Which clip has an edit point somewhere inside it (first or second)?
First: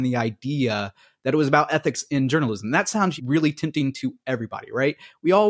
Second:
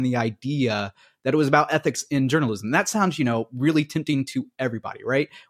first